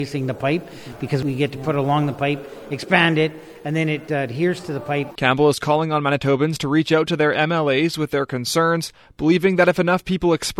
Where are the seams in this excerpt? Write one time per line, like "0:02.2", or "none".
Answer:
0:05.2

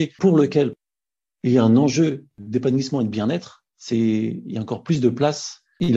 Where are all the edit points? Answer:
none

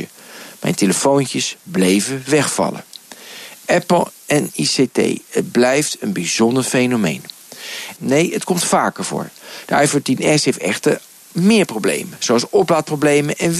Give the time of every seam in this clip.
0:04.2
0:08.0

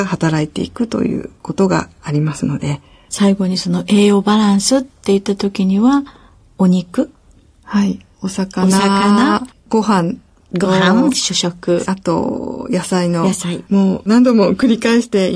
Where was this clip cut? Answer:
0:11.8
0:13.7

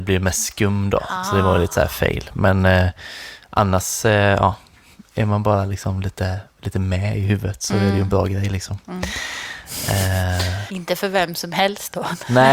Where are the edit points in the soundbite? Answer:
none

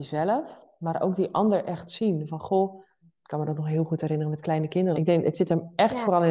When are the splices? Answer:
0:03.0
0:04.9

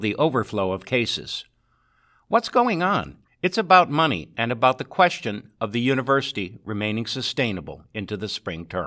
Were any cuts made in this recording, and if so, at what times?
0:03.3

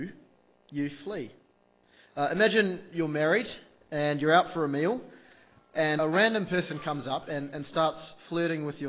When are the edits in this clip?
0:06.0

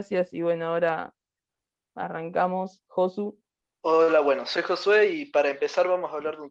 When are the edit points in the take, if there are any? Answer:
none

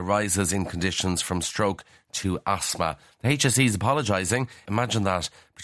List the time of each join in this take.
0:03.1
0:04.6

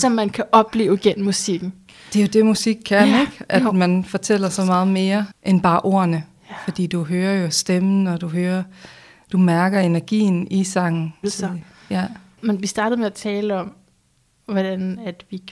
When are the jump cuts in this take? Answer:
0:11.2

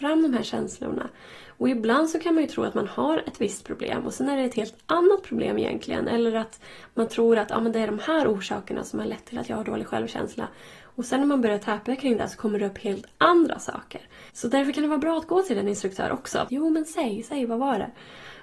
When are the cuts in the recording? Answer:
0:14.3
0:16.5

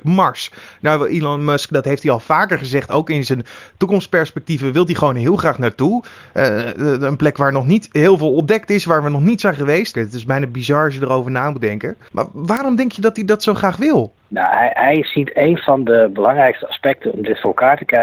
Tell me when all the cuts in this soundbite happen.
0:09.9
0:12.1

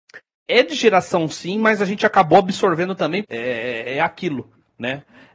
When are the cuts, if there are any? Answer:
0:03.2

